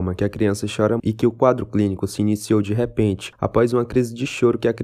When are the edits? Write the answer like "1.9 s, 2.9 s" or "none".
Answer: 1.0 s